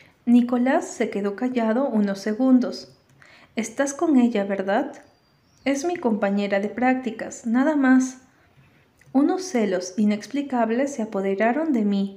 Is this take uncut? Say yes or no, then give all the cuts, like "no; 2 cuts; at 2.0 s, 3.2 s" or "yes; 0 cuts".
yes; 0 cuts